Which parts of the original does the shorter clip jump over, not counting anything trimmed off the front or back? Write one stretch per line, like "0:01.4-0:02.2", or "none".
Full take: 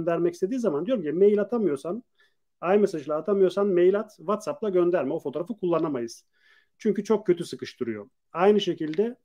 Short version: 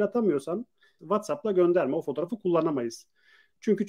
0:02.4-0:04.2